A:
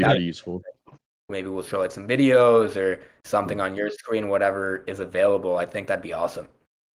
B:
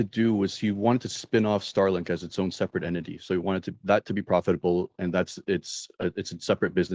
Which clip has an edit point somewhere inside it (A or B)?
A